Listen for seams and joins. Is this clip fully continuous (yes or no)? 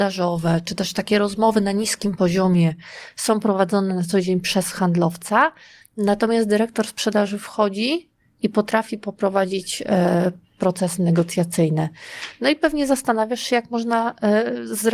yes